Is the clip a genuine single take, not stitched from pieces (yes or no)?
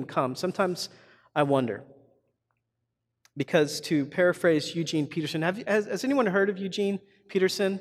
yes